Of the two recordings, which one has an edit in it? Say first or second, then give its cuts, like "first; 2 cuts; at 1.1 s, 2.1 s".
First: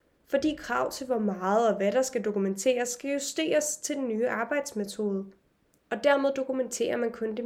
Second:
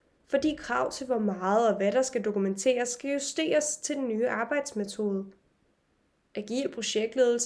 first; 1 cut; at 5.7 s